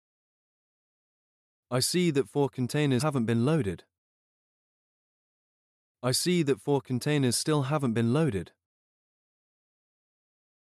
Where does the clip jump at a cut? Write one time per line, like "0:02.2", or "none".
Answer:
0:03.0